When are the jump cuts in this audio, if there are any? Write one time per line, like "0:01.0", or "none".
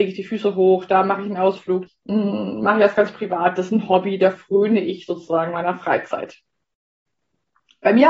0:01.9